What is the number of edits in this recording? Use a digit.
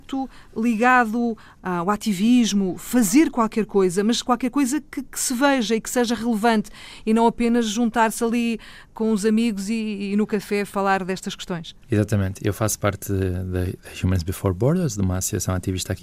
1